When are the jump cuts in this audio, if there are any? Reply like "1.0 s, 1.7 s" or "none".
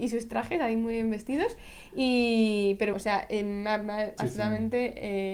2.9 s, 4.2 s

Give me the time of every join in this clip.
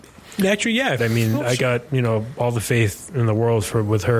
1.0 s

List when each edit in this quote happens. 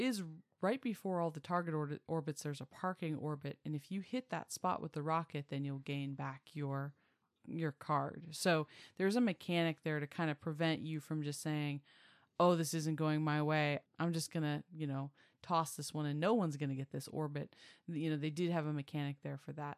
13.8 s

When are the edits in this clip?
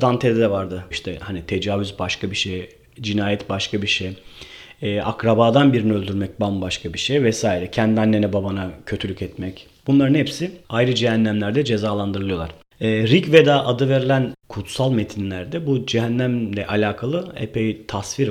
0.9 s, 10.6 s

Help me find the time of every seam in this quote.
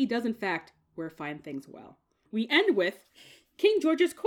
2.3 s

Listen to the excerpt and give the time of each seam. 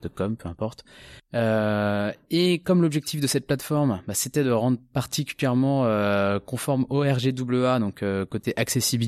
1.2 s

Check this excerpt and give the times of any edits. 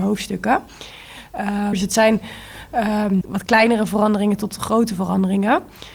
1.7 s, 3.2 s

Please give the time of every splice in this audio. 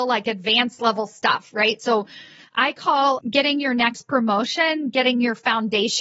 none

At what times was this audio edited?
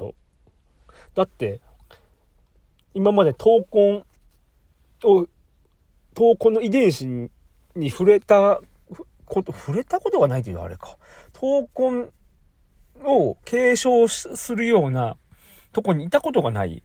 none

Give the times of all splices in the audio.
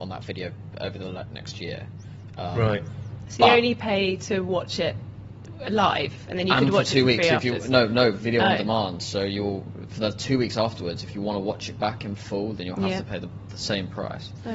none

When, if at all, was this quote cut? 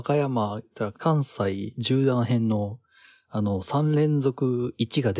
0.9 s

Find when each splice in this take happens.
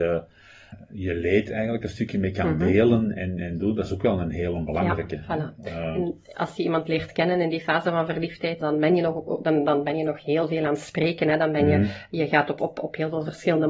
8.6 s

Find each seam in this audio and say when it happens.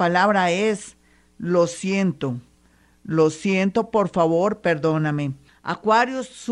5.5 s

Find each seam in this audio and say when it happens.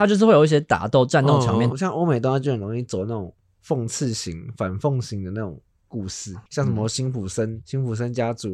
1.7 s, 6.5 s

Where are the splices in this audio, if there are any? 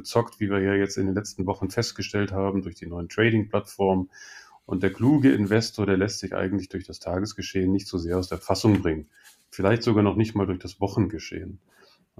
none

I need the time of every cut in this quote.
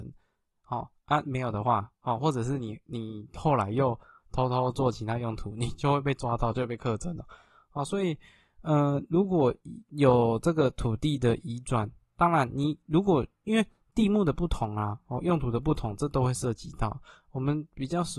none

